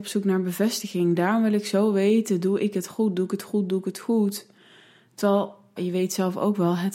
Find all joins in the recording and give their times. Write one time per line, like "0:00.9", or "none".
0:05.8